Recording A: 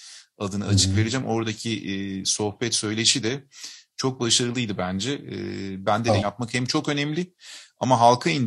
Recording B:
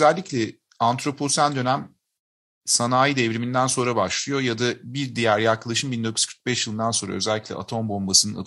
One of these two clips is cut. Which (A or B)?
A